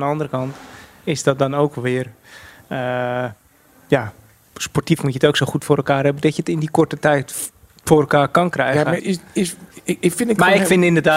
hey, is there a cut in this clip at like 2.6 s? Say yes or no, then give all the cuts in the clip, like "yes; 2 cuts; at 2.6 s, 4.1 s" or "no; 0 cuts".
no; 1 cut; at 9.0 s